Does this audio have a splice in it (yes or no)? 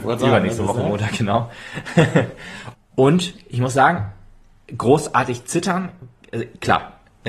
yes